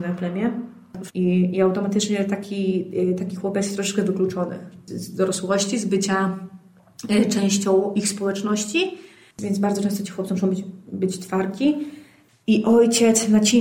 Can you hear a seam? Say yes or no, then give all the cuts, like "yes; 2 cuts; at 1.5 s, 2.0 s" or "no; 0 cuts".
yes; 2 cuts; at 1.1 s, 12.4 s